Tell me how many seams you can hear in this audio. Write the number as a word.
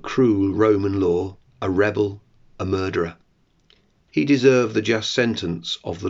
one